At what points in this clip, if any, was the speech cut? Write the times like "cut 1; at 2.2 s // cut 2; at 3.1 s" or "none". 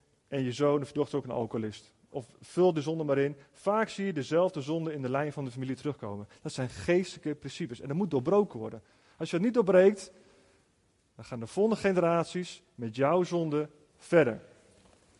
none